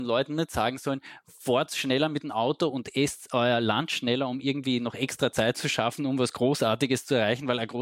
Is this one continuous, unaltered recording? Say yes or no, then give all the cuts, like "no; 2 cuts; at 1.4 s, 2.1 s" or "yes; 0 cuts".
yes; 0 cuts